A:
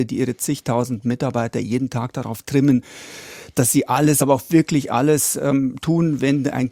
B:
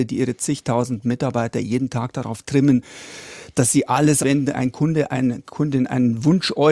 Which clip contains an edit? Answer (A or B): B